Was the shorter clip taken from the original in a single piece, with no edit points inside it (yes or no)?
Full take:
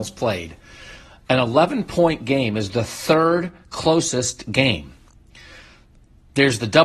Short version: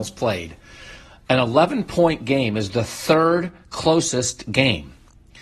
yes